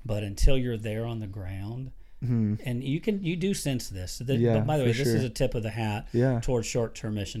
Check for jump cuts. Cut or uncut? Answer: uncut